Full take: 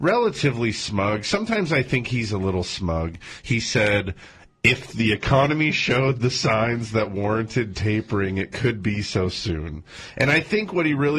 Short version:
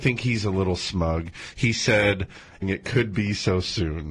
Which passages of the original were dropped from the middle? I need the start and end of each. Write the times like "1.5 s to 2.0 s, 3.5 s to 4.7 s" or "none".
4.5 s to 8.3 s